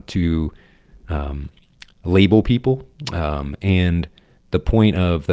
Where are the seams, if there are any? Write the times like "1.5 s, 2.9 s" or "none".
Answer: none